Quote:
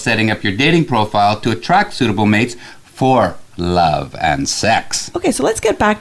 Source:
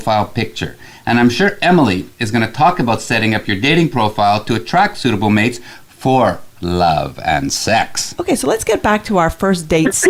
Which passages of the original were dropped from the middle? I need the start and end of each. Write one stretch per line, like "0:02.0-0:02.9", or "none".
none